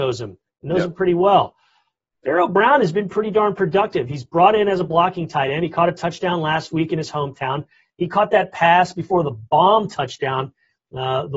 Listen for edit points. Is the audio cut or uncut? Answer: uncut